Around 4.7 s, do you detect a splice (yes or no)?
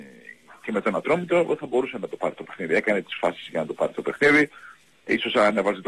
no